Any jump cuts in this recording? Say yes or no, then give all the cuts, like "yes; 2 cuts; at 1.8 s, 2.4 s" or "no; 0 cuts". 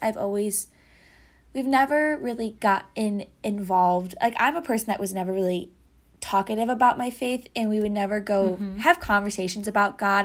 no; 0 cuts